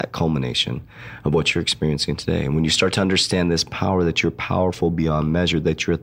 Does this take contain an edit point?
no; 0 cuts

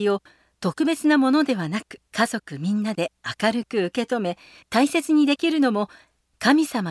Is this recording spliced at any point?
yes; 1 cut; at 2.1 s

